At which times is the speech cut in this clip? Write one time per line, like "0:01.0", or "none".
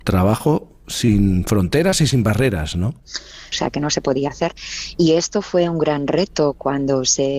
0:03.5
0:05.0